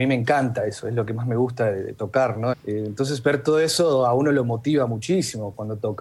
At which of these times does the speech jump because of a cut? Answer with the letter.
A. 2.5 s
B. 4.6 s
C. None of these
A